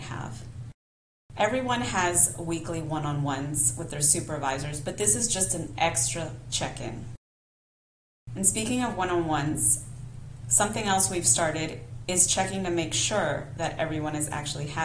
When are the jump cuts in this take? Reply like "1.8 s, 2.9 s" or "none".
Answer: none